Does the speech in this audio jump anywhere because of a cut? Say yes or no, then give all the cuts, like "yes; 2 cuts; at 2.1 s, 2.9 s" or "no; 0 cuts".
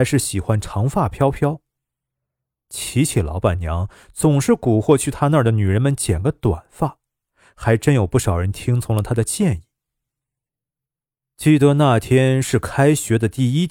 no; 0 cuts